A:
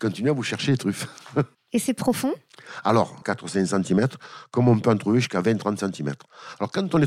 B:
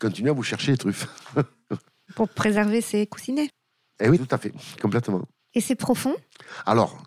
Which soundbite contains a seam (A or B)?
A